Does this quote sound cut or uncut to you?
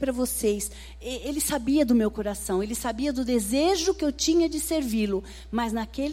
uncut